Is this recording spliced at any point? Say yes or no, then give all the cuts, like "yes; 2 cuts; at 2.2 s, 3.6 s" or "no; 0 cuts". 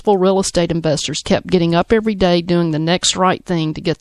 yes; 1 cut; at 1.2 s